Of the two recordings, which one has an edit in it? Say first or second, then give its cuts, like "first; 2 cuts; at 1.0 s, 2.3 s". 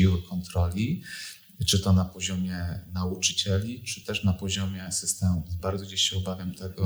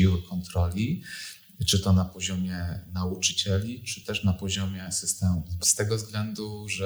second; 1 cut; at 5.6 s